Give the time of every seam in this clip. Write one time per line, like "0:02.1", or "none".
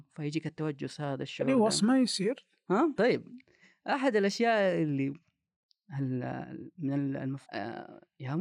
0:03.0
0:07.4